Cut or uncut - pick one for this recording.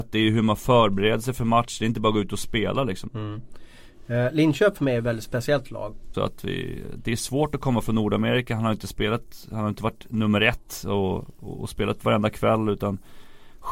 cut